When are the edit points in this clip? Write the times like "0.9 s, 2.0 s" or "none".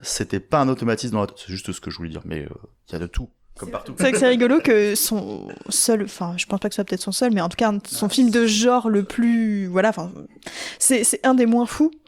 4.0 s

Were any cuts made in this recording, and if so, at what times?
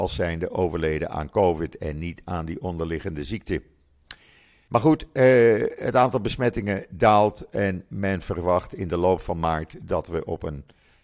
4.7 s

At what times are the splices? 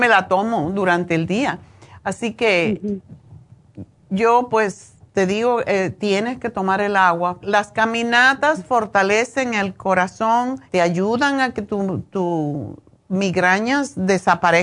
7.4 s, 10.7 s

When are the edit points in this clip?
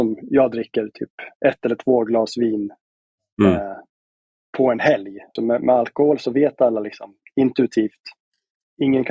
5.4 s

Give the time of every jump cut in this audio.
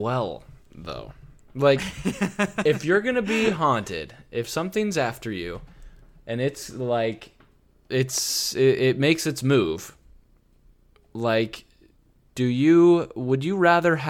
none

